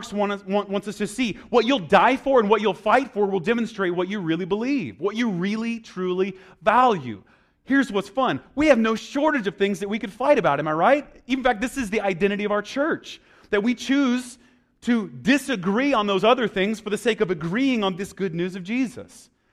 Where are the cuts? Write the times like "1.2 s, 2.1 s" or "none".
none

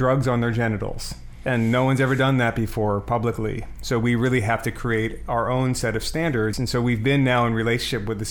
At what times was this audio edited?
6.5 s

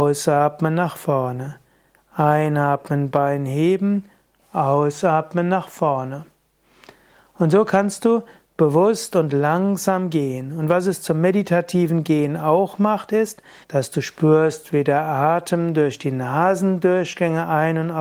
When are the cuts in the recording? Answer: 13.6 s

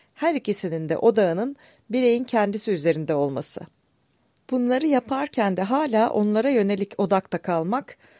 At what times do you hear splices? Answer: 4.4 s

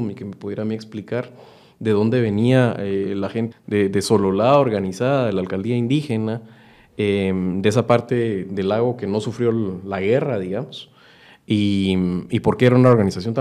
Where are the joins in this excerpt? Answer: 3.5 s

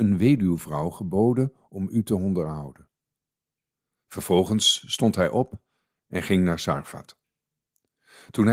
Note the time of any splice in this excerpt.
none

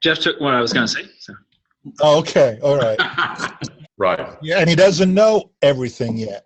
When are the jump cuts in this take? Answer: 3.8 s

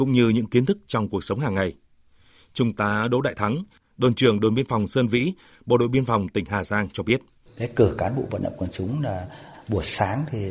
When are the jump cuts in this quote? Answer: 7.5 s

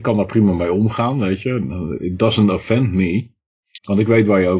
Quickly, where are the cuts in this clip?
none

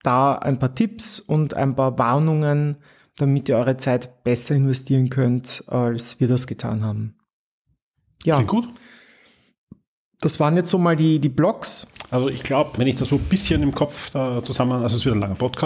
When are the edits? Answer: 12.8 s

